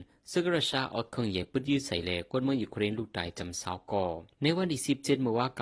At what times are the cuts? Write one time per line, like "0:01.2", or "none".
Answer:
0:04.3